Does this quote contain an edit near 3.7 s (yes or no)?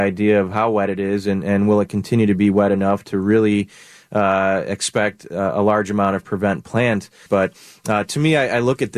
no